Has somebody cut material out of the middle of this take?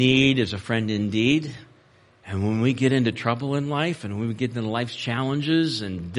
no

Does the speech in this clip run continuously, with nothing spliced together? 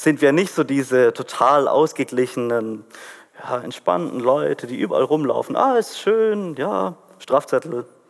yes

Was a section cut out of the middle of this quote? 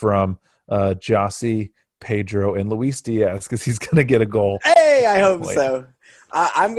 no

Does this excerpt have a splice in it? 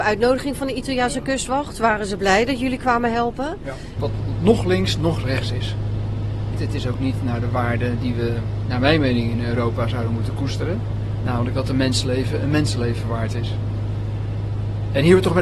yes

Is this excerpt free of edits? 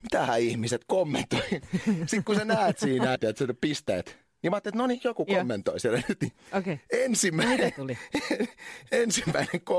no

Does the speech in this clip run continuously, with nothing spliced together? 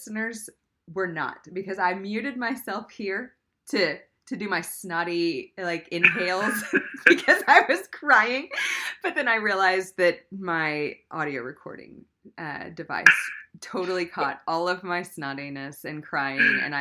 yes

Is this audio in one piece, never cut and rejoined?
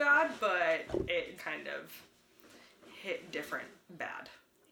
no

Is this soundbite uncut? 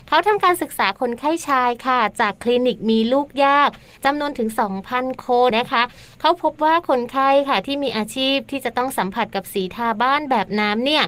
no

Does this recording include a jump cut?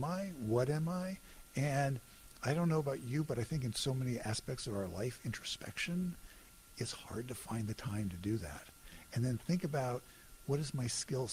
no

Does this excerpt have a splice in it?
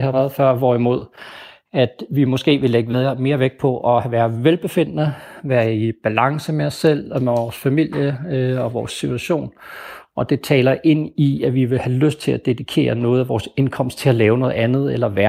no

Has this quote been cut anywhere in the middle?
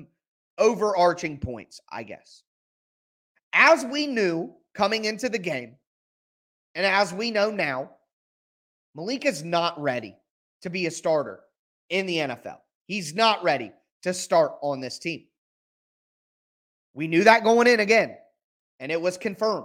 no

